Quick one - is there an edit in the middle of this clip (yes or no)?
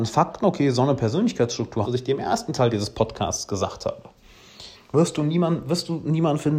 yes